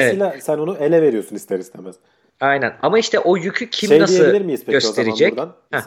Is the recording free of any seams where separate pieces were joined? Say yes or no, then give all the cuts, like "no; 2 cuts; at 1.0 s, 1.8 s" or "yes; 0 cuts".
yes; 0 cuts